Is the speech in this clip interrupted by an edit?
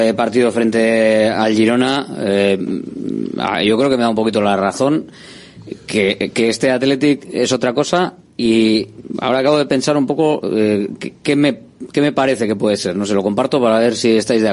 no; 0 cuts

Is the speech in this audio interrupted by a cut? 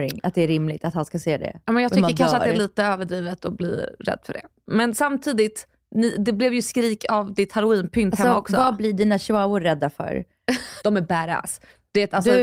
yes; 1 cut; at 10.8 s

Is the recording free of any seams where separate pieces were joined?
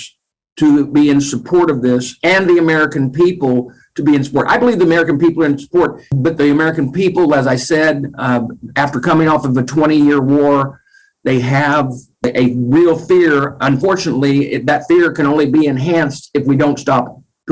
yes; 0 cuts

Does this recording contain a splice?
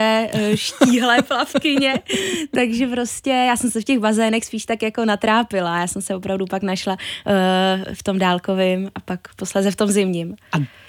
no; 0 cuts

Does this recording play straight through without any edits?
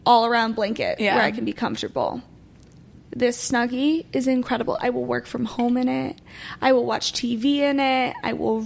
yes; 0 cuts

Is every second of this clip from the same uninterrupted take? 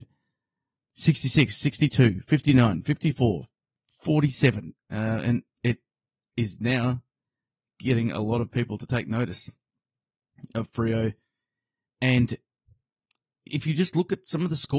no; 1 cut; at 4.8 s

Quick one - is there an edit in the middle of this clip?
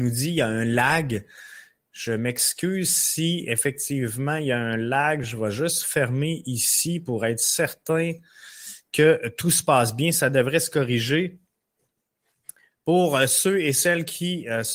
no; 0 cuts

